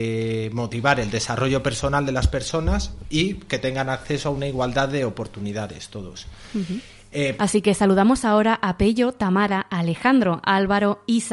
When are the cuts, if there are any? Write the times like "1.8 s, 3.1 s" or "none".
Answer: 7.4 s